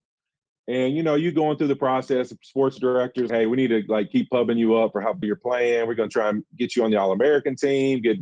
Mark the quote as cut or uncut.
cut